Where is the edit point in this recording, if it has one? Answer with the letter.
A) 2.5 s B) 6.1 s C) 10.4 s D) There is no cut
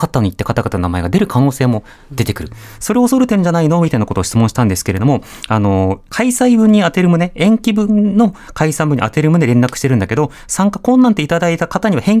B